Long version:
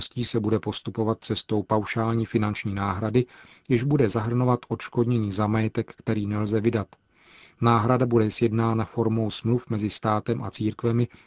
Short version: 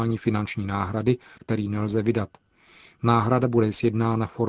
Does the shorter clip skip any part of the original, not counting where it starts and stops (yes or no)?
yes